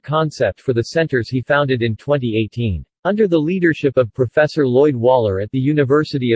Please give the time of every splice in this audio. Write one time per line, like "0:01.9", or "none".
0:02.9

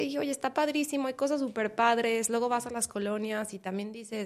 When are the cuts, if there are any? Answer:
none

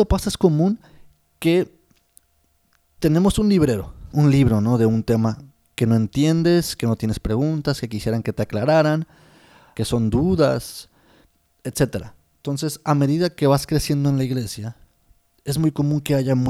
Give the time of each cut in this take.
0:04.1
0:09.7

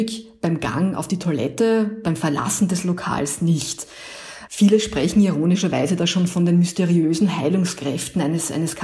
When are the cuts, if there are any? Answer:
none

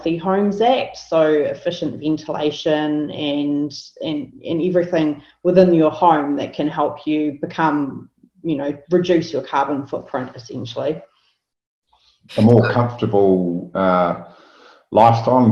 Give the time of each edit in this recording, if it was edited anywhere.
0:12.3

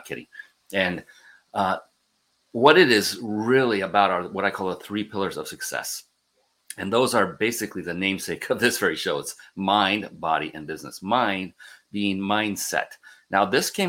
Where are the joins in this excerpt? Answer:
none

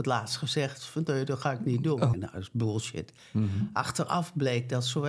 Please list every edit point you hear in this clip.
0:02.1

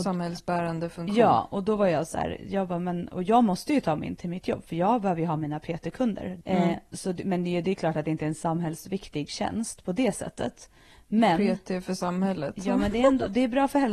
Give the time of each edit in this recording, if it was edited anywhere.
0:06.4

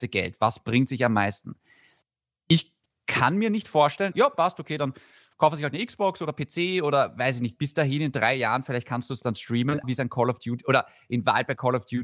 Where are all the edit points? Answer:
0:04.1
0:09.8

